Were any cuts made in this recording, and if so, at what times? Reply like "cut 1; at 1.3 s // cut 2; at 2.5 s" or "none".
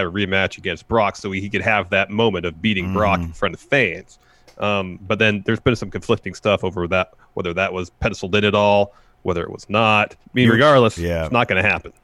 cut 1; at 10.2 s